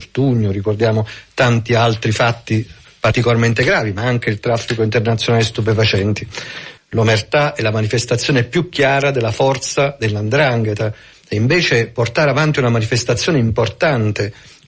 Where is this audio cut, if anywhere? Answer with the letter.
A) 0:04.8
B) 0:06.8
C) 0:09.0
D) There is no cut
B